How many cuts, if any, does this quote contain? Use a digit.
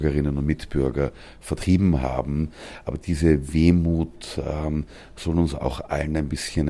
0